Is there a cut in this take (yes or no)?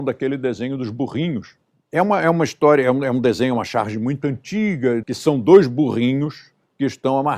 yes